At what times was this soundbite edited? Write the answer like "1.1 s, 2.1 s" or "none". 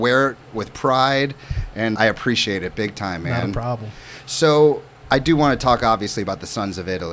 2.0 s